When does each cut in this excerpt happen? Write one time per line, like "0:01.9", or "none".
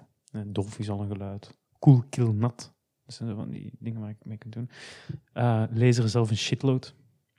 none